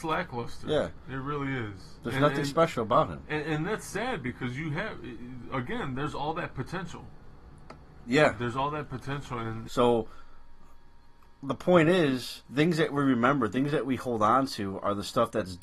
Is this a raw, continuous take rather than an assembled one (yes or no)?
no